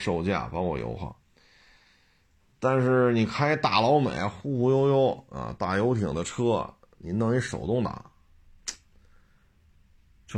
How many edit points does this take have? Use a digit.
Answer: 0